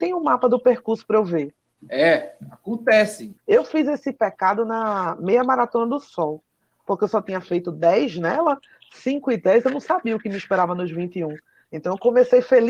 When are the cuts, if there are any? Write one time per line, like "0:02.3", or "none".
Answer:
0:01.8
0:03.4

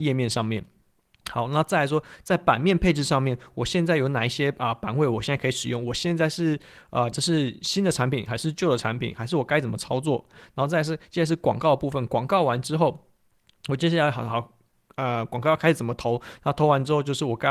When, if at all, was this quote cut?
0:07.1

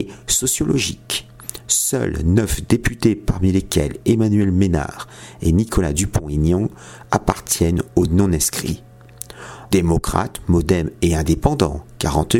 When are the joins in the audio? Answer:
0:01.6
0:09.7

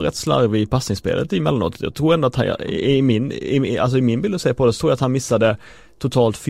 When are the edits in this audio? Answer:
none

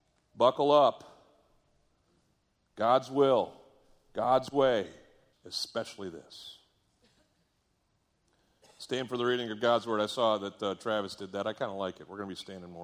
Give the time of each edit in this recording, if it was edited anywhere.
0:05.3

